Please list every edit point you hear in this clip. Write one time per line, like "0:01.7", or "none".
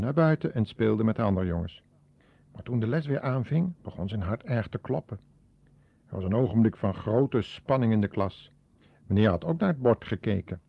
none